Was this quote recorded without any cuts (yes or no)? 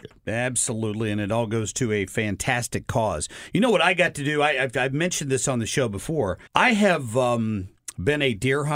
no